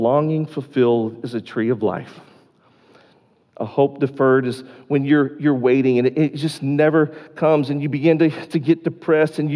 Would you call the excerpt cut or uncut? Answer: uncut